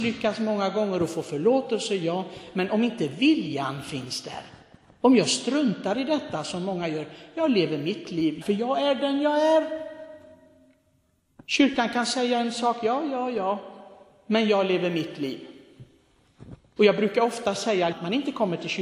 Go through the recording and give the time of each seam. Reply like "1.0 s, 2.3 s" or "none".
8.4 s, 16.8 s, 17.9 s